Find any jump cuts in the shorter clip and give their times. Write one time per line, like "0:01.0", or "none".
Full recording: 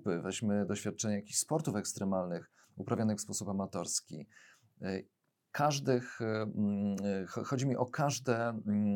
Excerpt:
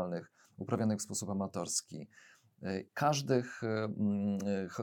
0:02.9